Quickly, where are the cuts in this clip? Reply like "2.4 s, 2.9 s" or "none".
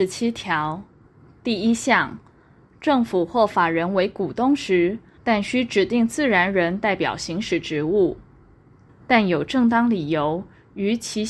5.2 s, 8.9 s